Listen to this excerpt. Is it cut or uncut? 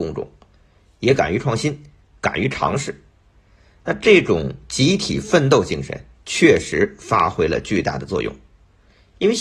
uncut